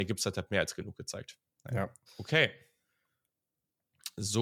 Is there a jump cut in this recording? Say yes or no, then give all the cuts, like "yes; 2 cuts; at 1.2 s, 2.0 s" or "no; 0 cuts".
yes; 1 cut; at 2.1 s